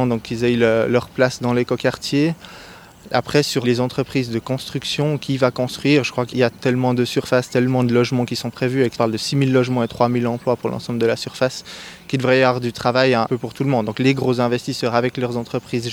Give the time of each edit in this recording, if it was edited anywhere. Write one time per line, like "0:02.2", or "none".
none